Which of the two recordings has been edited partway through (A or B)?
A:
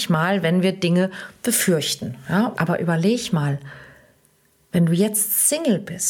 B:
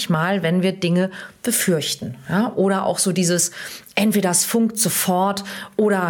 A